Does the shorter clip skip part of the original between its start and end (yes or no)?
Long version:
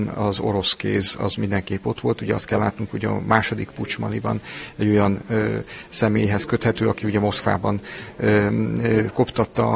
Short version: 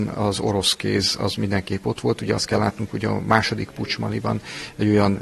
no